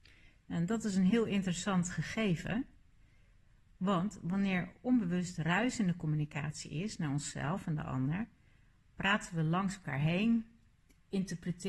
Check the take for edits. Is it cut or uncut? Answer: uncut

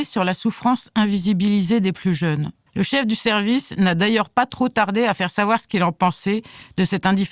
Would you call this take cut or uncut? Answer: cut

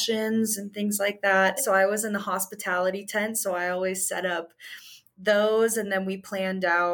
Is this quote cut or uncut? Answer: cut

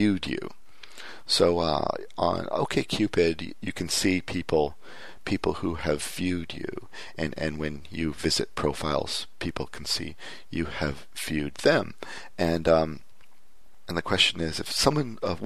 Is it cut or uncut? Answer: uncut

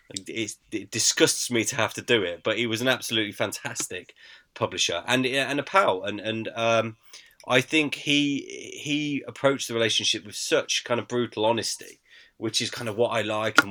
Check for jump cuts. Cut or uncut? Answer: uncut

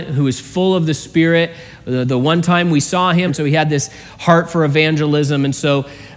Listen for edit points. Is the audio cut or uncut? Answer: cut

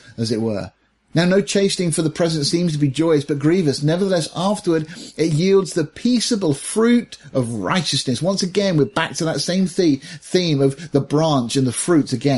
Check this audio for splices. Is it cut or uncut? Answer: uncut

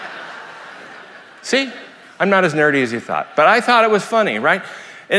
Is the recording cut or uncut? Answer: uncut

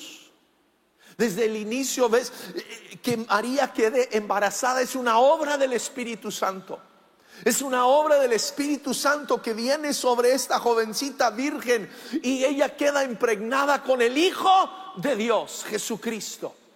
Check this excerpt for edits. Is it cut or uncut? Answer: uncut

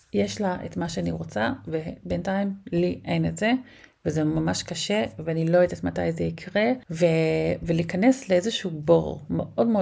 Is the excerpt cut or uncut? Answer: uncut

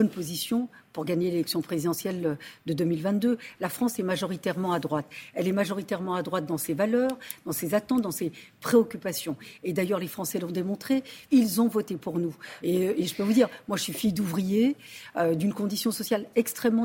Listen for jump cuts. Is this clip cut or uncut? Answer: cut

